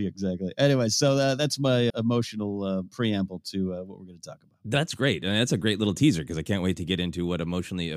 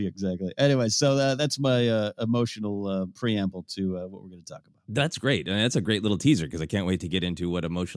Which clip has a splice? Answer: first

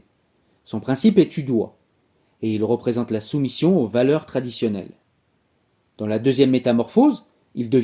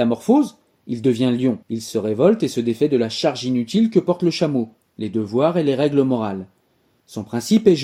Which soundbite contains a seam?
second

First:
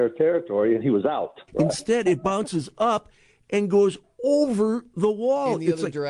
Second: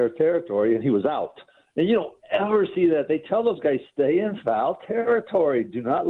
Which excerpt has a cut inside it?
first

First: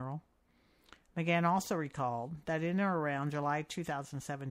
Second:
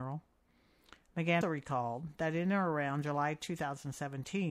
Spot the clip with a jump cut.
second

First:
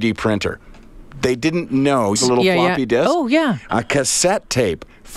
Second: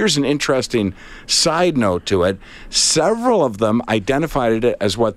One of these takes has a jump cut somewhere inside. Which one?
first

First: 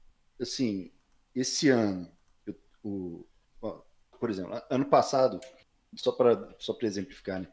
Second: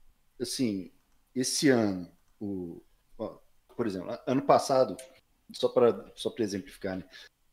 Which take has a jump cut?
second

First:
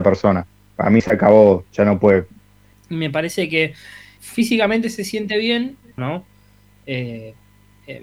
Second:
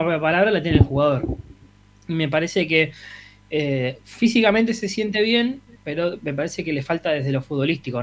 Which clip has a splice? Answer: first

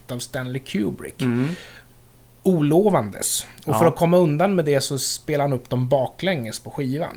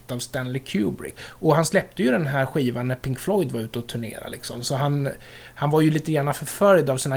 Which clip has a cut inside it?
second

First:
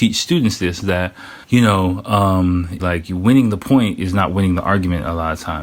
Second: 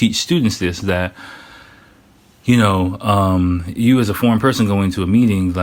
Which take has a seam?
first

